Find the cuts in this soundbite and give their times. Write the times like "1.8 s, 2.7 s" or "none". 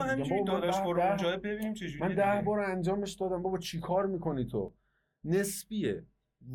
none

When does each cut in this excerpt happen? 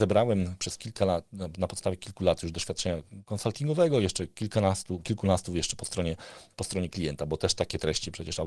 none

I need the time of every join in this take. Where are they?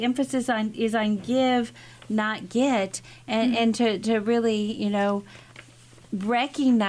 none

